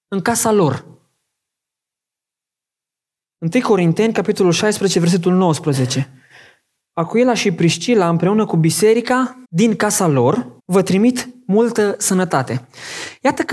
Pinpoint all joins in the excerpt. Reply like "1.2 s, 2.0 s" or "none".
9.4 s, 10.6 s